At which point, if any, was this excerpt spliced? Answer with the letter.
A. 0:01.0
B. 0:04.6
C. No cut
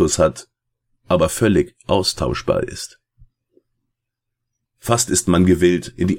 B